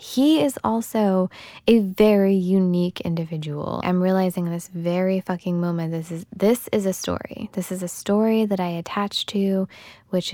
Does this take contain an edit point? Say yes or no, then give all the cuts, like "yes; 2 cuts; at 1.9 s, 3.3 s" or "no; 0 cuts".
yes; 1 cut; at 3.8 s